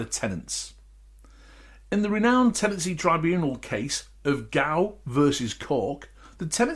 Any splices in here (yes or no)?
no